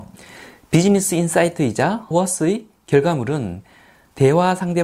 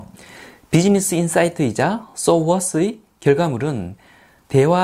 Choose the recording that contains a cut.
first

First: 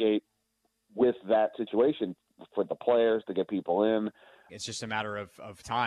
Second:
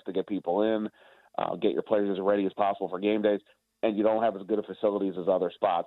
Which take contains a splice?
first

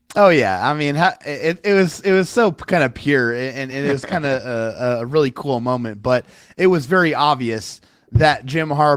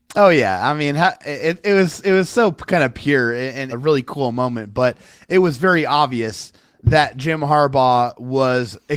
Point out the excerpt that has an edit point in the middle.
second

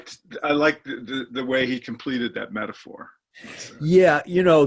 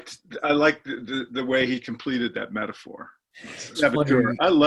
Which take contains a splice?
second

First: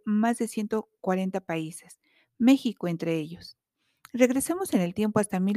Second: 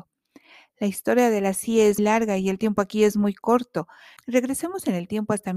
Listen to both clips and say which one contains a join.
second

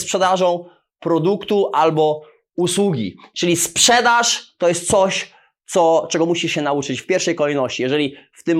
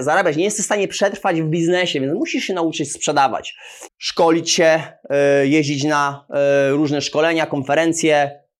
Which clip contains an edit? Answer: second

